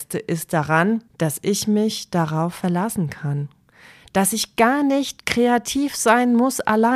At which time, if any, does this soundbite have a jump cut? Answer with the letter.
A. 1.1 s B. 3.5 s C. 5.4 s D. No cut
A